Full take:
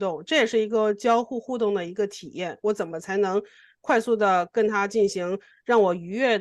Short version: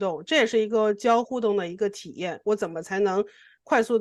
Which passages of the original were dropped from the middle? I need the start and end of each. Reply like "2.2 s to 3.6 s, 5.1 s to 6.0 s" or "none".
1.2 s to 1.4 s